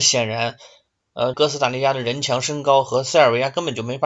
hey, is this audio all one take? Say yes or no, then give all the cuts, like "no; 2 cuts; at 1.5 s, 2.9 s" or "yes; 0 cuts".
no; 1 cut; at 1.3 s